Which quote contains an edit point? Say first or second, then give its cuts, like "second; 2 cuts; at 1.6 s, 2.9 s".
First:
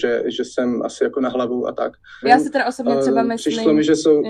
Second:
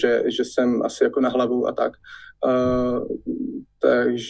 first; 1 cut; at 2.2 s